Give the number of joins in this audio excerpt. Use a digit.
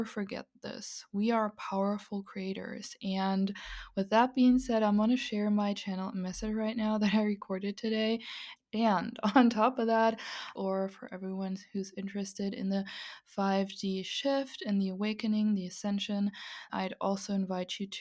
3